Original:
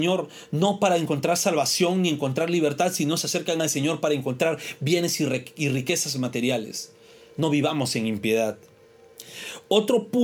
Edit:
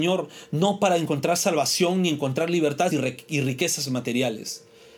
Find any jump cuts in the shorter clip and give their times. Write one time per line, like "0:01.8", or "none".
0:02.9